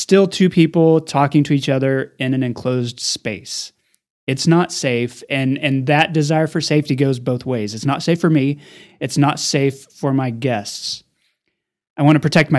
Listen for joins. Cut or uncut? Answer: uncut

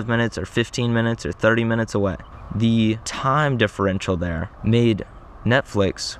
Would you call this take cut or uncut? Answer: uncut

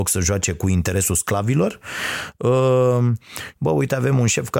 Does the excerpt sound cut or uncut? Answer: cut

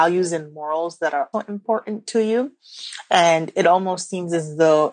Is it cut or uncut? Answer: cut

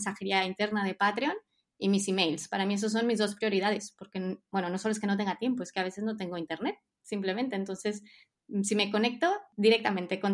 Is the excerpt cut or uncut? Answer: uncut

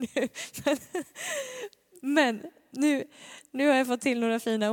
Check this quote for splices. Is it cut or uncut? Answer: uncut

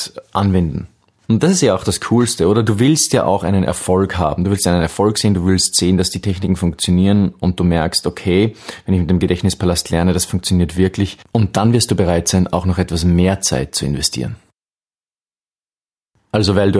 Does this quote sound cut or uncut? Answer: uncut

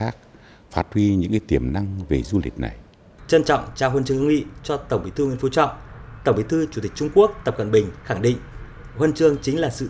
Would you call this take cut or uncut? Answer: cut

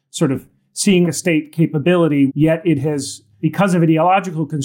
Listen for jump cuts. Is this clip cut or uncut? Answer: cut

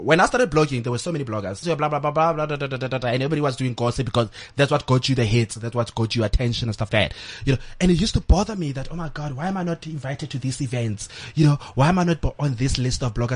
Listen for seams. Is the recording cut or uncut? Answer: cut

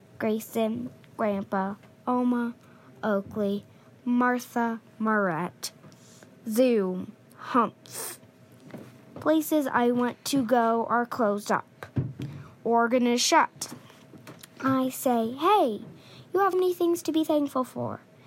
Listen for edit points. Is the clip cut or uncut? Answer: cut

